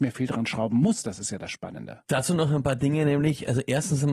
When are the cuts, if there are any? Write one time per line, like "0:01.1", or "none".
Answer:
none